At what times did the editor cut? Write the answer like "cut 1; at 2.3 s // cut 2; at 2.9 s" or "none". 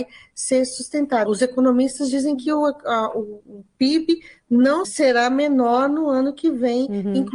cut 1; at 1.3 s // cut 2; at 4.8 s

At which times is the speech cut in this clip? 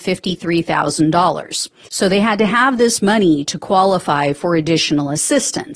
cut 1; at 1.9 s

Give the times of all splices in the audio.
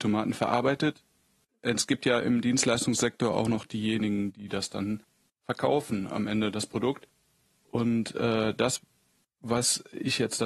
none

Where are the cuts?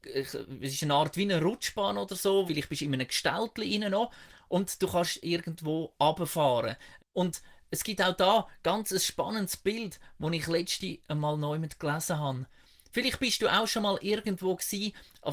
cut 1; at 2.5 s // cut 2; at 7.0 s

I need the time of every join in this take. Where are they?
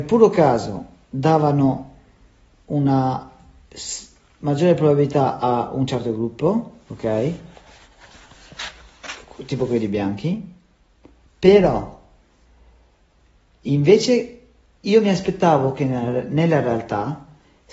cut 1; at 6.9 s

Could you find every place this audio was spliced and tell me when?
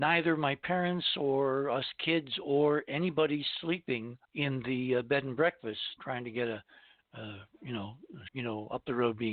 cut 1; at 4.2 s // cut 2; at 6.0 s // cut 3; at 8.3 s

